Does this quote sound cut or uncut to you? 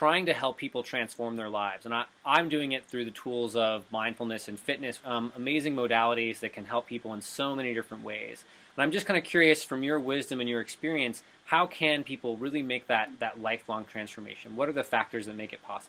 cut